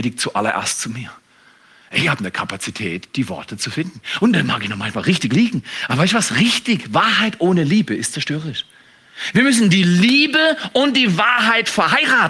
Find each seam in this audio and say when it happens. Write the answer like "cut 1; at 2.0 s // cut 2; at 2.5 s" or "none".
none